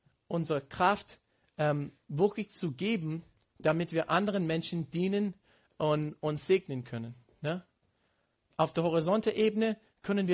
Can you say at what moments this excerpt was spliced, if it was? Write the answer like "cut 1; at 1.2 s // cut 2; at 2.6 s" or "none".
none